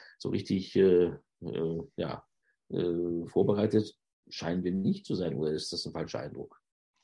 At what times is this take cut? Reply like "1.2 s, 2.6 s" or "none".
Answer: none